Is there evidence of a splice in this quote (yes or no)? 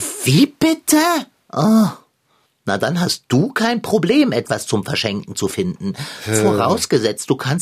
no